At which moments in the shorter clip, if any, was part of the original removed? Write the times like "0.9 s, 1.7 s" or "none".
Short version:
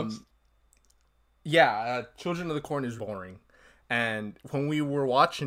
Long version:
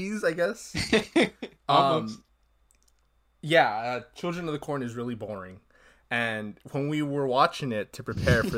3.0 s